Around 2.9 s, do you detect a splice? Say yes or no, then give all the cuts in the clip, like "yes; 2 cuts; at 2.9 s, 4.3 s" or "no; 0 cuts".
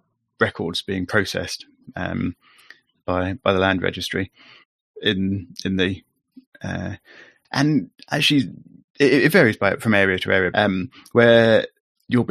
no; 2 cuts; at 7.4 s, 10.5 s